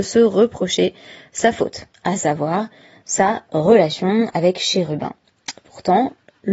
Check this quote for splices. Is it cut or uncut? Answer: uncut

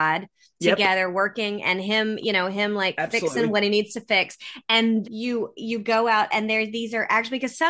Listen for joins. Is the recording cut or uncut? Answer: cut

